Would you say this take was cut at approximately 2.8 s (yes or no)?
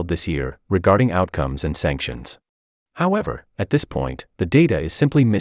yes